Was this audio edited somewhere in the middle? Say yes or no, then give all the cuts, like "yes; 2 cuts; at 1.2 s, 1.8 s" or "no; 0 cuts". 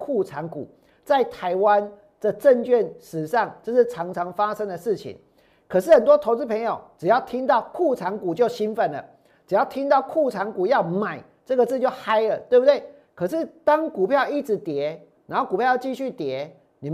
yes; 2 cuts; at 13.0 s, 15.2 s